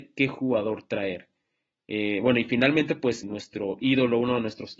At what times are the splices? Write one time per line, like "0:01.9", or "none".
0:03.2